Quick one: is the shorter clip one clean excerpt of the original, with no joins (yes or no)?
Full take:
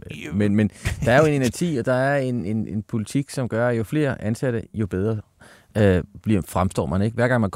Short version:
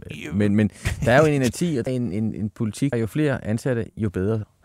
no